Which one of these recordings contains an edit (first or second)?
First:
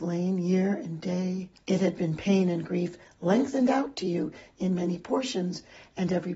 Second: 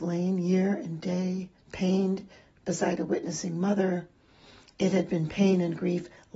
first